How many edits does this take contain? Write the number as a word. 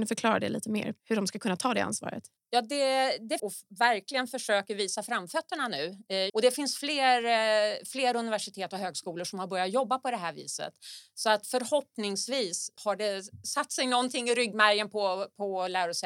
two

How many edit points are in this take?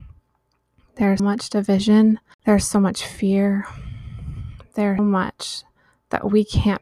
two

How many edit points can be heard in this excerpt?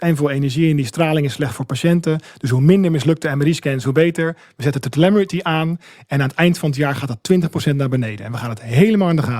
zero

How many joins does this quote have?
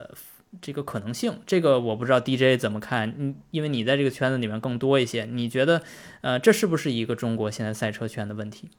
zero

